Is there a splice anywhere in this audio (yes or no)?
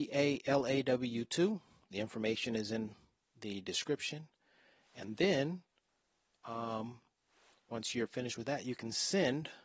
no